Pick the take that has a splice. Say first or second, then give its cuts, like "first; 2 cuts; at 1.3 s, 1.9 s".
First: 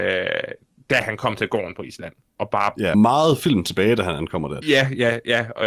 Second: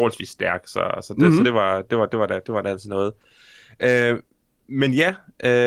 first; 2 cuts; at 2.9 s, 4.6 s